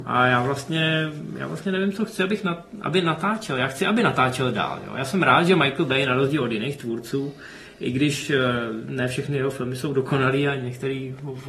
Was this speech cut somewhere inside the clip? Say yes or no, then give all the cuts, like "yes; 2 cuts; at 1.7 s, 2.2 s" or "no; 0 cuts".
no; 0 cuts